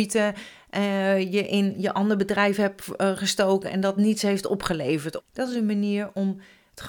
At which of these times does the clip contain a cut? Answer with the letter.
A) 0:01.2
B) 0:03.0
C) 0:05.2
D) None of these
C